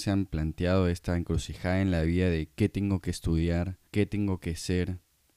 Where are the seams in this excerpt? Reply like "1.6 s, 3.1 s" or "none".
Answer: 3.9 s